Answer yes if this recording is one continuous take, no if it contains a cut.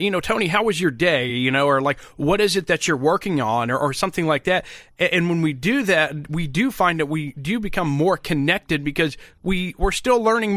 yes